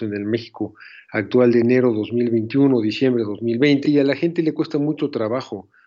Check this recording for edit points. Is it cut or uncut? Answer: cut